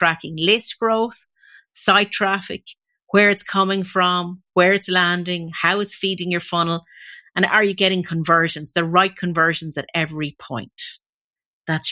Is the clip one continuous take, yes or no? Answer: yes